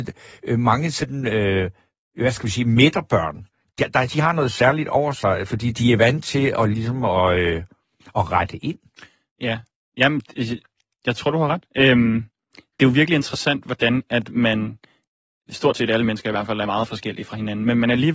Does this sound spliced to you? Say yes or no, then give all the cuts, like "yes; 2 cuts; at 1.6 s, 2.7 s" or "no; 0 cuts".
no; 0 cuts